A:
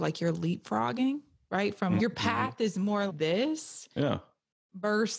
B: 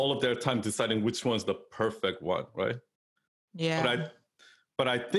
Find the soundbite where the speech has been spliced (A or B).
A